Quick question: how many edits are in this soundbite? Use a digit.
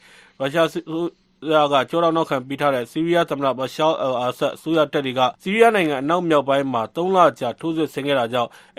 1